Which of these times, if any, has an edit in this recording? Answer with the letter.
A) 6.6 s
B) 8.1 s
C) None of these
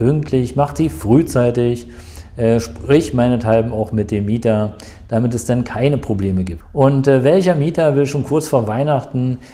A